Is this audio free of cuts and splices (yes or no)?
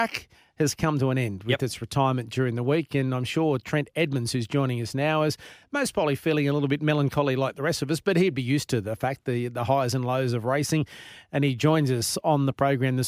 yes